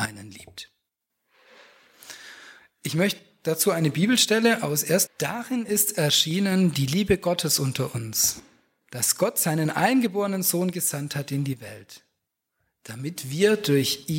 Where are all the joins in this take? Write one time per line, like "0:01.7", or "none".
0:05.1